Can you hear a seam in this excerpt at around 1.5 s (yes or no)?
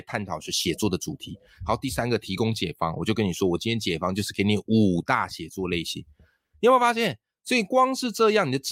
no